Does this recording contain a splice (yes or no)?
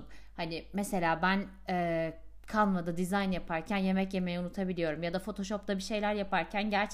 no